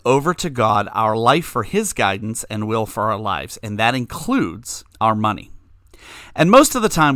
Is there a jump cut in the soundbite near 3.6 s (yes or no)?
no